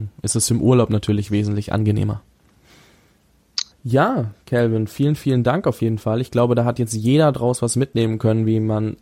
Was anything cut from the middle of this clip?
yes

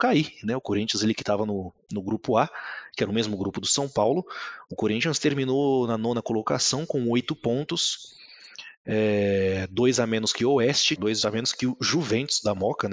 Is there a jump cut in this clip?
yes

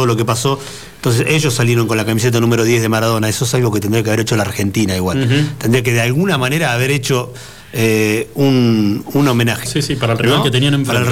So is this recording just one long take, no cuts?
no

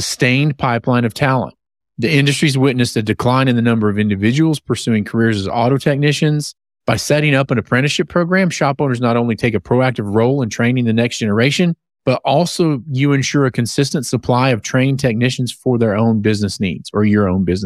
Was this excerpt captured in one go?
yes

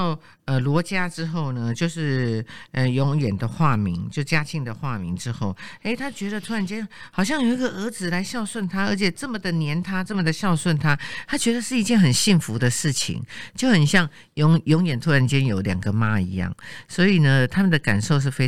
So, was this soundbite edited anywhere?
no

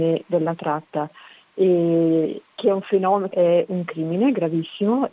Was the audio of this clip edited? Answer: yes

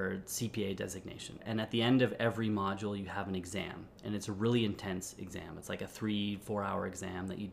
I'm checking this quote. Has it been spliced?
yes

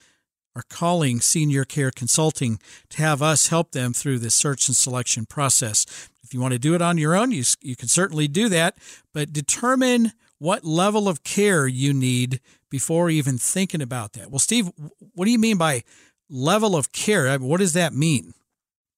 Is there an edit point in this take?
no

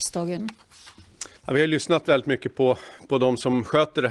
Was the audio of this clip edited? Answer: yes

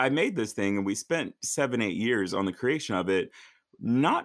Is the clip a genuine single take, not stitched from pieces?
yes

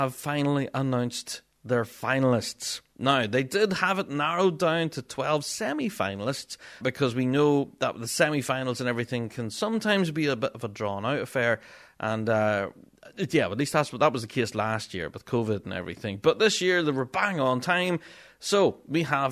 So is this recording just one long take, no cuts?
no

